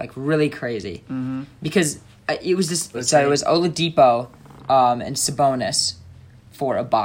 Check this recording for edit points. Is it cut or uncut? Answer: cut